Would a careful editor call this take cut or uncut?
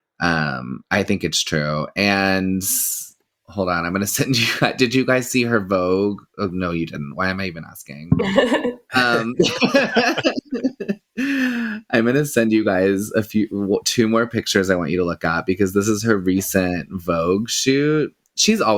uncut